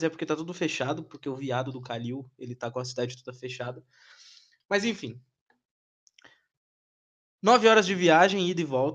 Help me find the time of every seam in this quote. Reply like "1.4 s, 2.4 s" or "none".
none